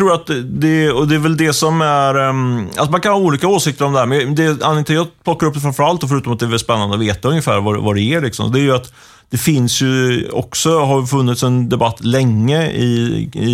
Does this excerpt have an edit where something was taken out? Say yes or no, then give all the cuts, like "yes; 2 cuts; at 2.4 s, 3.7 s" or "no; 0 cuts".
no; 0 cuts